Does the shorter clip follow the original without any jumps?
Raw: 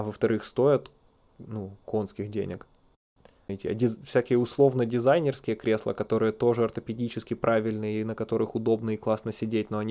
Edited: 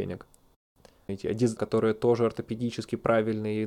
no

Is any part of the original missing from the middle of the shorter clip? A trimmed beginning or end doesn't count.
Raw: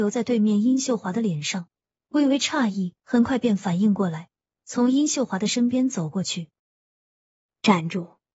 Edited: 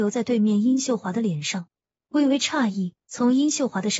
yes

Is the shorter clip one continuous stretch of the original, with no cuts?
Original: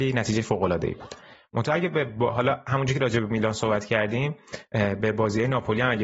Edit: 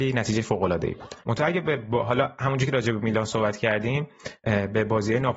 no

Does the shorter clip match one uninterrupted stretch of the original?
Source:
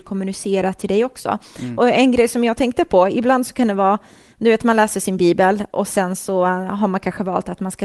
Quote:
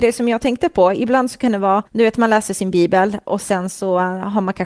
no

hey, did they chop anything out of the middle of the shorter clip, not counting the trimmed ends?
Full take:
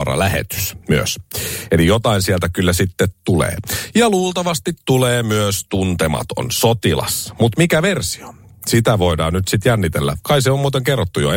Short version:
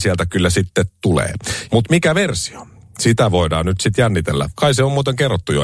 yes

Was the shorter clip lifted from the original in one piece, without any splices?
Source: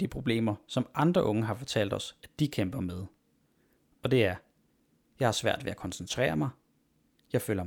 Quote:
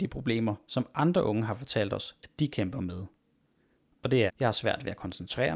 no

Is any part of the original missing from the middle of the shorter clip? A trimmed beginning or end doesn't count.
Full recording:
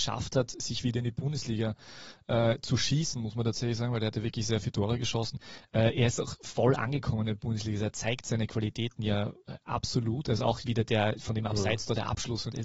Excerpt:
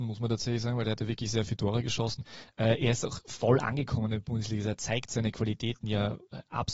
no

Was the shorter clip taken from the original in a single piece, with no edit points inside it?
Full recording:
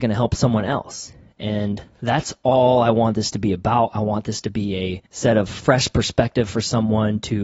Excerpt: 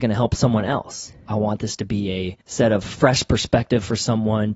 no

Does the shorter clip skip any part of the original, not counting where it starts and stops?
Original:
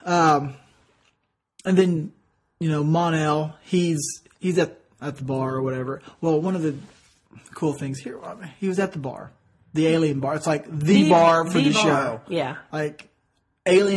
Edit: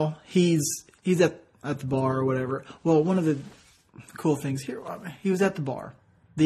no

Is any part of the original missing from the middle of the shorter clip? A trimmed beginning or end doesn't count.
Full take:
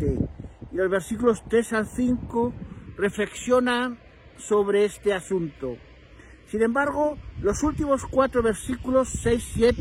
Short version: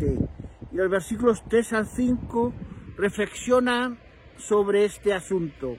no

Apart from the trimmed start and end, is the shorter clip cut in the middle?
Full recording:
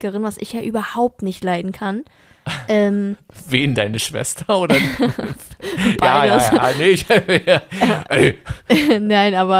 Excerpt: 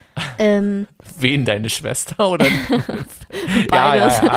no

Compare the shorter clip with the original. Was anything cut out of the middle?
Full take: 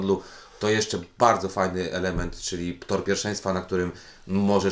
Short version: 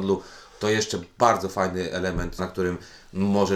yes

